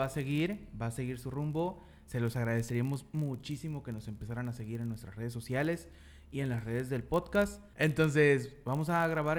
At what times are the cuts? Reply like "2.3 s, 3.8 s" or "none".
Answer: 7.7 s